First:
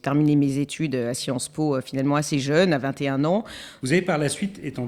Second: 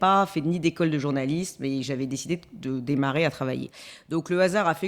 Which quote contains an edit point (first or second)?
first